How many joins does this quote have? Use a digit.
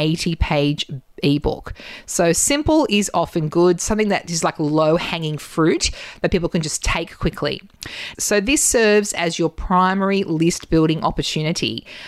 1